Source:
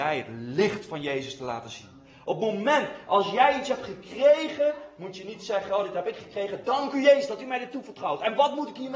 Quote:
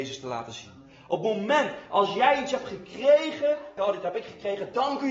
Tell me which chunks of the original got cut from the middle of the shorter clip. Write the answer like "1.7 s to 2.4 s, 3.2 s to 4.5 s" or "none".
4.9 s to 5.7 s